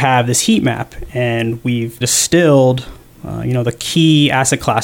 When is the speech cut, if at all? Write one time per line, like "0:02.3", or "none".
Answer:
0:02.0